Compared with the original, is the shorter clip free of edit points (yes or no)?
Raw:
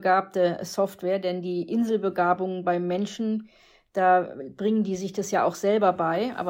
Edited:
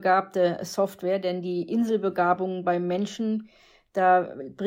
yes